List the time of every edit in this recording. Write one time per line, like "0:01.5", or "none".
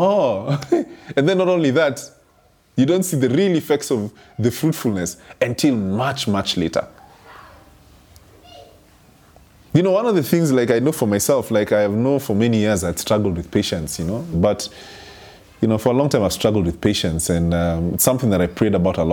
0:14.3